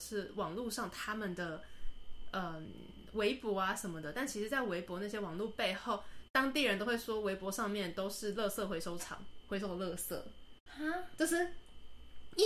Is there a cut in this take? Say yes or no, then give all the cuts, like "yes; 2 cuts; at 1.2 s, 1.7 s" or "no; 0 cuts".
no; 0 cuts